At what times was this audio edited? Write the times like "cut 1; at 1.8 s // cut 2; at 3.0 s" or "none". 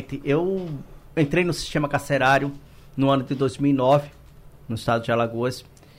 none